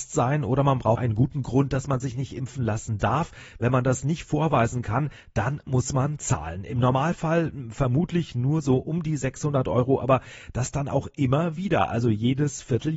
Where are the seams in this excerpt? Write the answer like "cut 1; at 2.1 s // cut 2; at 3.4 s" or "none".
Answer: cut 1; at 1.0 s